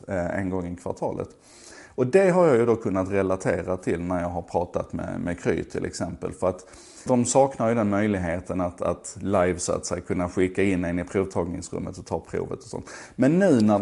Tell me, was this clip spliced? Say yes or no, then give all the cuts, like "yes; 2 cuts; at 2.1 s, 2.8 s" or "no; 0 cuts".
yes; 1 cut; at 7.1 s